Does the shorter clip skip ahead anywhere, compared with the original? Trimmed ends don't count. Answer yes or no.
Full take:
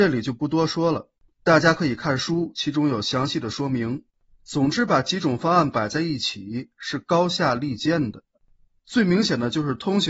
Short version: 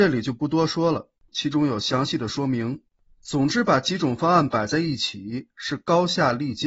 yes